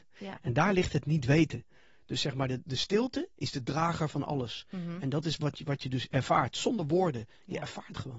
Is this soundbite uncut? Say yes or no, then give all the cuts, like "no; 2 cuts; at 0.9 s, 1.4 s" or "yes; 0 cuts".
yes; 0 cuts